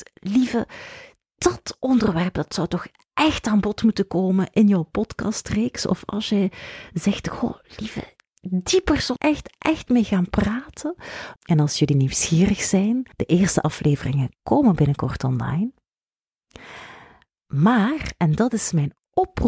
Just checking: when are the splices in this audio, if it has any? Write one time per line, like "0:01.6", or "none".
0:09.2
0:11.4
0:13.1